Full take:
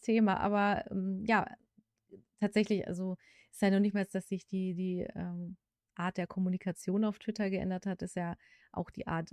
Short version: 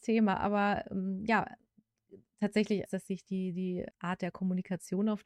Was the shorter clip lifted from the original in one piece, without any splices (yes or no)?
no